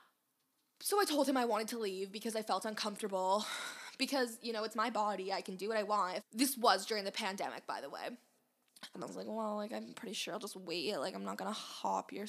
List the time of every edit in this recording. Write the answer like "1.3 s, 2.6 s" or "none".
6.2 s, 8.9 s